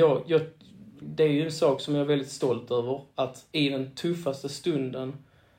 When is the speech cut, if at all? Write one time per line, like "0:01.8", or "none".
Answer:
0:01.0
0:03.5

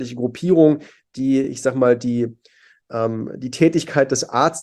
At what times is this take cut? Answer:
none

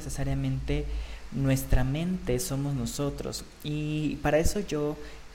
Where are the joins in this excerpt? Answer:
none

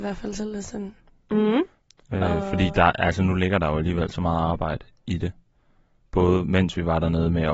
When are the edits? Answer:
0:01.2

